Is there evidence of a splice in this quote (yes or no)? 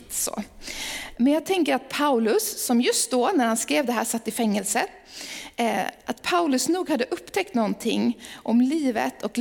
no